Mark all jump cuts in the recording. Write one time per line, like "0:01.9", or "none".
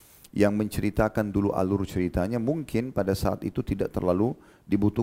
none